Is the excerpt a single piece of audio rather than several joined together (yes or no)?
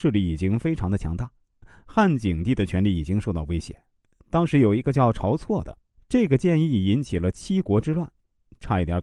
no